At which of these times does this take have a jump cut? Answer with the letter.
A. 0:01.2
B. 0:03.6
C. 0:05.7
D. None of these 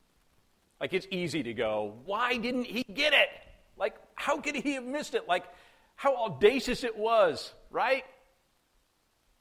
D